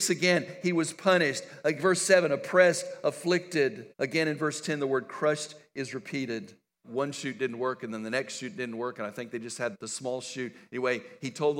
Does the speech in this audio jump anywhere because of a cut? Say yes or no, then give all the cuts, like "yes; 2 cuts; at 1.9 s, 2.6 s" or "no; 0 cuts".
yes; 3 cuts; at 3.9 s, 6.8 s, 9.7 s